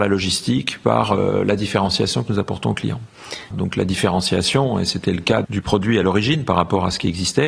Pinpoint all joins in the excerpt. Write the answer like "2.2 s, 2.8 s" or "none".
3.5 s, 5.4 s